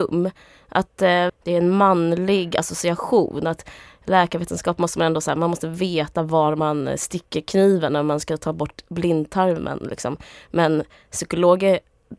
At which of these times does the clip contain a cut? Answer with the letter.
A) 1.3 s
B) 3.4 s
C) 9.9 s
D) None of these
A